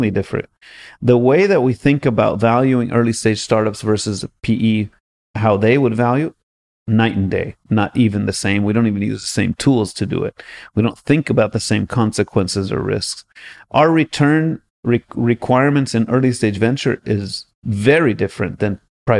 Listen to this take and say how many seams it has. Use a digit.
0